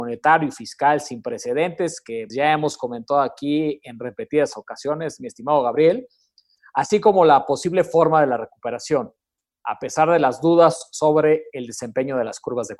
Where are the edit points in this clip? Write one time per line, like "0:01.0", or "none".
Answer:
0:02.3